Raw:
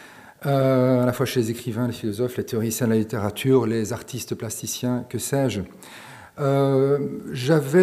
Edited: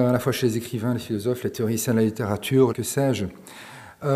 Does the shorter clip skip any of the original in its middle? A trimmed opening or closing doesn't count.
yes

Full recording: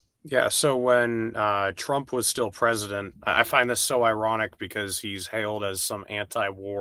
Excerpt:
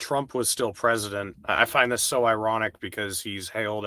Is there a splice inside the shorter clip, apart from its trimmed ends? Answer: no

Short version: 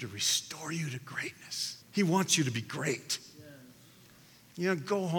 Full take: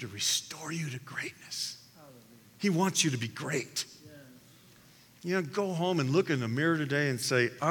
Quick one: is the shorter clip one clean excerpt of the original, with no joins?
no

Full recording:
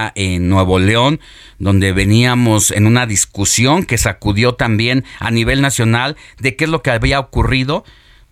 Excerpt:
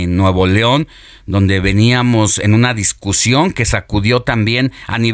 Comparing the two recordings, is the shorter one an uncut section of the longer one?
yes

